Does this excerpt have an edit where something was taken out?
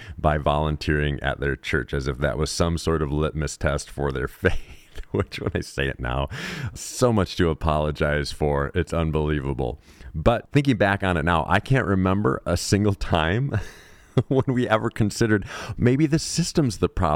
yes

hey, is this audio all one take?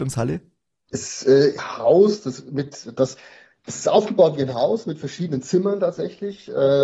no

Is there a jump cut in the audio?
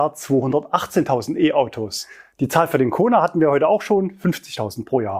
no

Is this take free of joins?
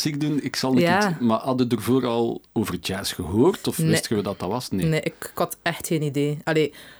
yes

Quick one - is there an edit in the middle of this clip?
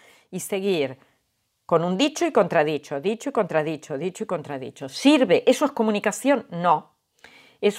no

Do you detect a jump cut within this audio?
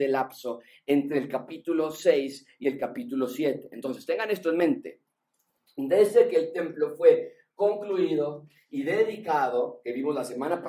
no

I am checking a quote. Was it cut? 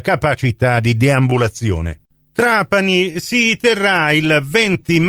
no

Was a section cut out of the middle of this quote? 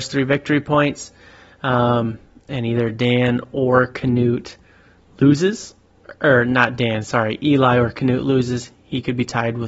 no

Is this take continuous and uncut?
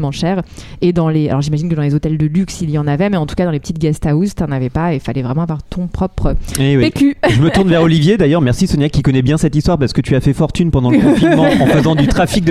yes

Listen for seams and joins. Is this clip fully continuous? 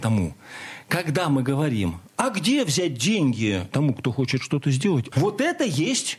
no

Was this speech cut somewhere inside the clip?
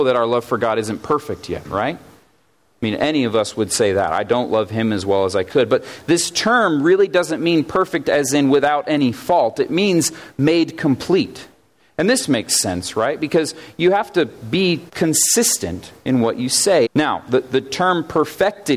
yes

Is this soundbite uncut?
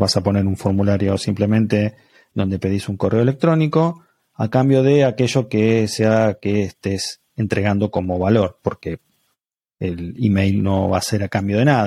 yes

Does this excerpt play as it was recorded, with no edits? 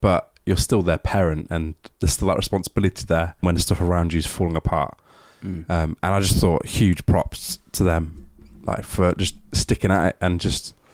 no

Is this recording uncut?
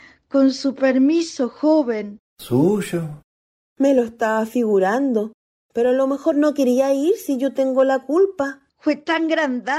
no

